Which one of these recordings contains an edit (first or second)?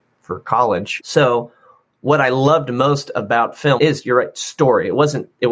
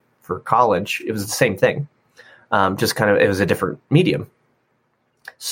first